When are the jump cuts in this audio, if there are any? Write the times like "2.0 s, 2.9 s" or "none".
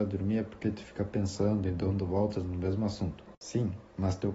3.3 s